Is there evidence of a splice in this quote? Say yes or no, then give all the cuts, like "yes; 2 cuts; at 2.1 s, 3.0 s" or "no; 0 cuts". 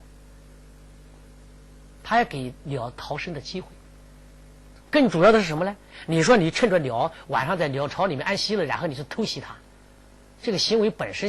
no; 0 cuts